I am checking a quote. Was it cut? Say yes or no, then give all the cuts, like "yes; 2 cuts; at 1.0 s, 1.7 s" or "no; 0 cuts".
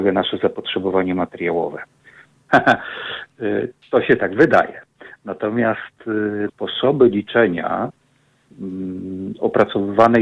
yes; 2 cuts; at 2.5 s, 6.5 s